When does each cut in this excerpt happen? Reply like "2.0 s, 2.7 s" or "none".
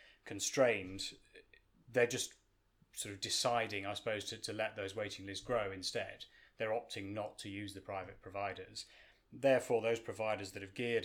none